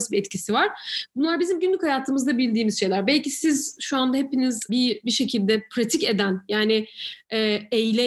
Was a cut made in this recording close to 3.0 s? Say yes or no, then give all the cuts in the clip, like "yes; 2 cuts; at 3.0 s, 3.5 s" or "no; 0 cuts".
no; 1 cut; at 4.7 s